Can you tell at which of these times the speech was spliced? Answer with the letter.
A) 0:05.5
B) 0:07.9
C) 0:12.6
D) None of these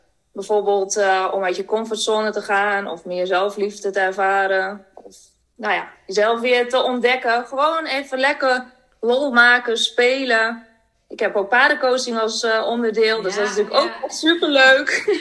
D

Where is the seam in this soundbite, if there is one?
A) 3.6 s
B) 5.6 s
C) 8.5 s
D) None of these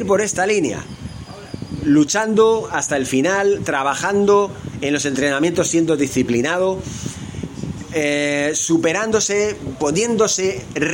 D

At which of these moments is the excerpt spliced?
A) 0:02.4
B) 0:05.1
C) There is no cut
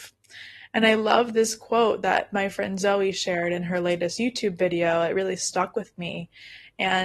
C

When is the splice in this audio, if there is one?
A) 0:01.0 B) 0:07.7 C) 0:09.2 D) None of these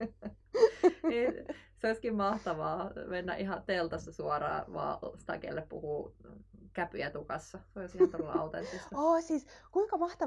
D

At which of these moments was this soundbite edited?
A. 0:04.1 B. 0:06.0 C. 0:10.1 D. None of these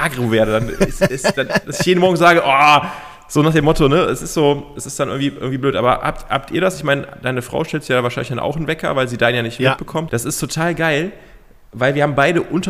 C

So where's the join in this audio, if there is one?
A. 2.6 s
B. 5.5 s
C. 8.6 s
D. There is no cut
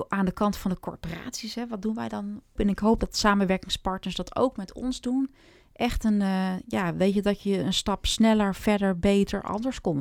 A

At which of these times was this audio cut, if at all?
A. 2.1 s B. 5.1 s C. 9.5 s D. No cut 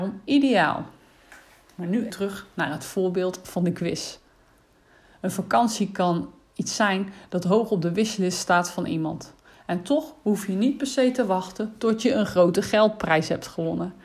A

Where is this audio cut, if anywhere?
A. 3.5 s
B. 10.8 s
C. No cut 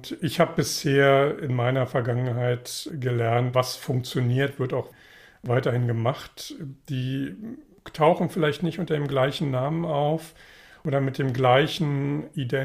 A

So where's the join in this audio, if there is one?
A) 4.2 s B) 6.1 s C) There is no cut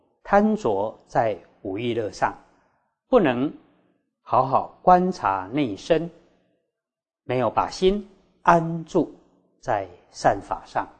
C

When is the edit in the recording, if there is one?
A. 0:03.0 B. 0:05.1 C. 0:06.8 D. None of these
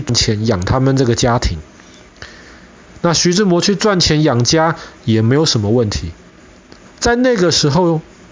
C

